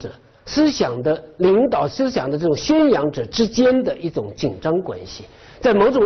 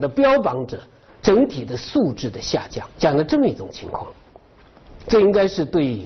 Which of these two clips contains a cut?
second; 2 cuts; at 1.1 s, 2.9 s

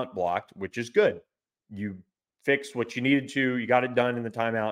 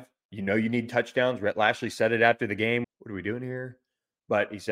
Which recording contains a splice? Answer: second; 1 cut; at 2.8 s

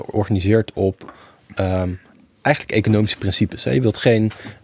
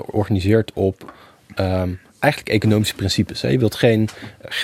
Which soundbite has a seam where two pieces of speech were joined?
second; 1 cut; at 2.1 s

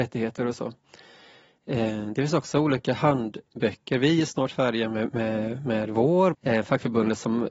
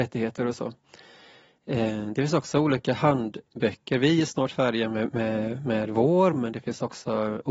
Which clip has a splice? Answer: first; 1 cut; at 6.3 s

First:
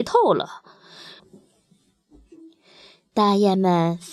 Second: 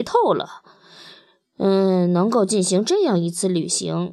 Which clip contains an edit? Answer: first; 1 cut; at 1.2 s

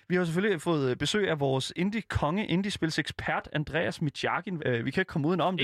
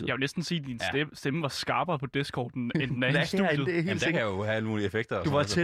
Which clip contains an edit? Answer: first; 1 cut; at 4.6 s

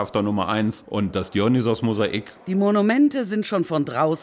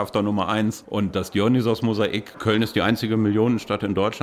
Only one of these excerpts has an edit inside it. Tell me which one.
second; 1 cut; at 2.3 s

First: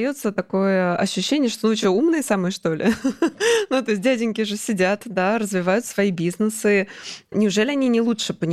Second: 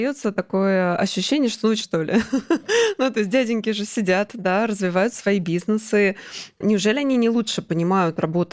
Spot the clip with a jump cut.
second; 1 cut; at 1.8 s

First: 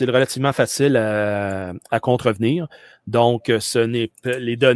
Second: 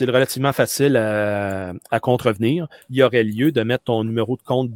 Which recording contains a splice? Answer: second; 1 cut; at 2.8 s

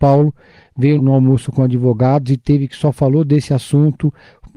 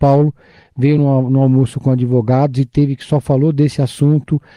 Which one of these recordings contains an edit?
first; 1 cut; at 1.0 s

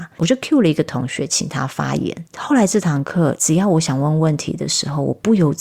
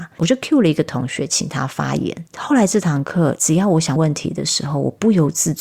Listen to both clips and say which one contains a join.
second; 1 cut; at 4.0 s

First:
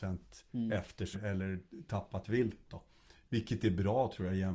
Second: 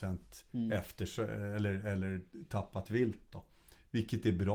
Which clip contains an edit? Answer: first; 1 cut; at 1.1 s

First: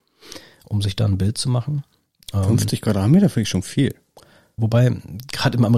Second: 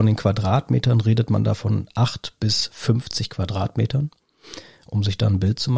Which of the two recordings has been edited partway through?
first; 1 cut; at 4.6 s

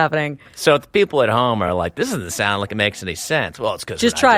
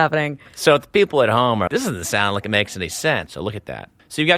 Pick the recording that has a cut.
second; 2 cuts; at 1.7 s, 3.3 s

